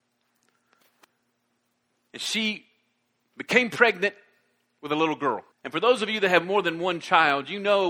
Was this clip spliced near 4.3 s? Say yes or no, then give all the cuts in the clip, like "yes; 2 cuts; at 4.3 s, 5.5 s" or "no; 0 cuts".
no; 1 cut; at 5.5 s